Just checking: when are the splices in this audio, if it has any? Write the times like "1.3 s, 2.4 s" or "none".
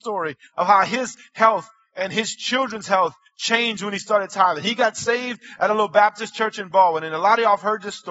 none

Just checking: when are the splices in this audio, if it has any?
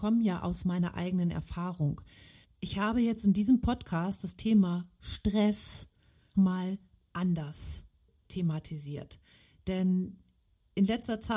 2.4 s, 6.3 s

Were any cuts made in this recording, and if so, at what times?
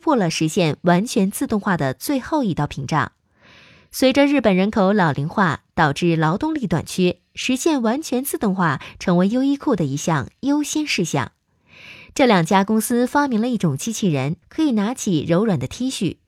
14.4 s

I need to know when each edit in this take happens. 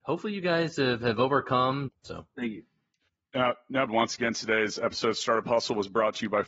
1.9 s, 3.9 s

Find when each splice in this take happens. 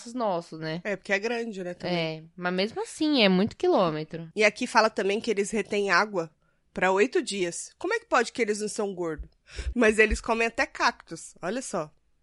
4.3 s, 9.7 s

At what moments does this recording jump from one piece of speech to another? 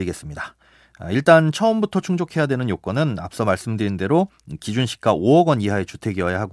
none

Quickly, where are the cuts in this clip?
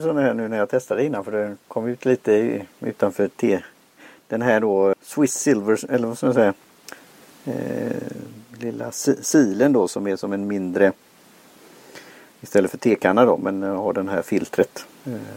4.9 s

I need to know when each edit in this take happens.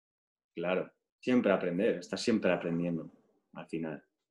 1.1 s

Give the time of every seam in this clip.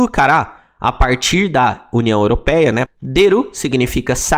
2.9 s

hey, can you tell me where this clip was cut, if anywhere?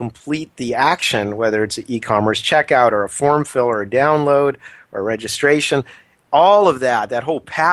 none

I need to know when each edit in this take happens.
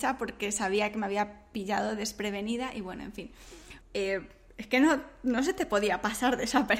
3.8 s

